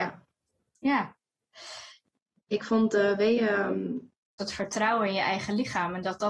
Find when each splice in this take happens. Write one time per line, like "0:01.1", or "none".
0:02.4
0:04.4